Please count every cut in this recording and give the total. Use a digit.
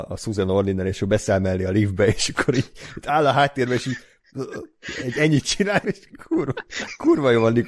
1